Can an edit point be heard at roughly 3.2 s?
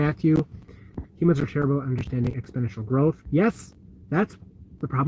no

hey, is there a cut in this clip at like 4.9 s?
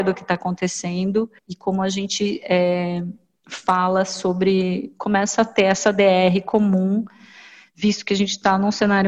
no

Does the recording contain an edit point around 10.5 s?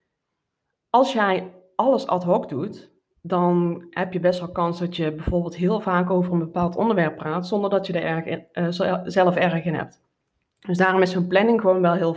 no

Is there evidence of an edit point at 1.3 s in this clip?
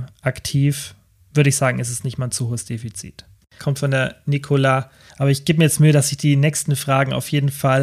no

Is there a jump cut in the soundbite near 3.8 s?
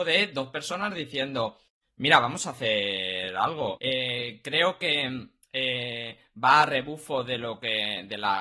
yes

